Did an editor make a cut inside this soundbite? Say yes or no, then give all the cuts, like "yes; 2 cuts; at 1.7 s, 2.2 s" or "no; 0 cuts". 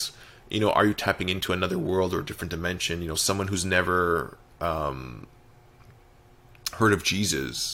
no; 0 cuts